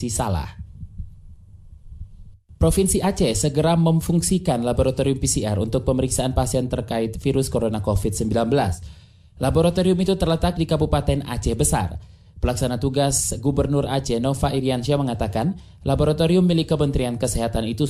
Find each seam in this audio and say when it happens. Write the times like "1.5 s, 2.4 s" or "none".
none